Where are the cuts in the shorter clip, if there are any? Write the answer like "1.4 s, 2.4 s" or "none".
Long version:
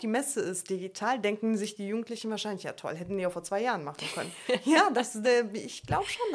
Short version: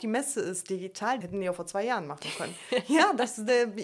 1.2 s